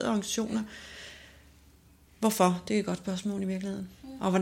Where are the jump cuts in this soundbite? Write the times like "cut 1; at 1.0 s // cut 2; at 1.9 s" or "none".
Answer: none